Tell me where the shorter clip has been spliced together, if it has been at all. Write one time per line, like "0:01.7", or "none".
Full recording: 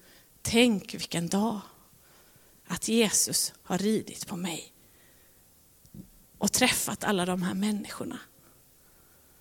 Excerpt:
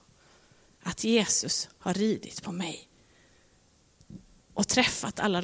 none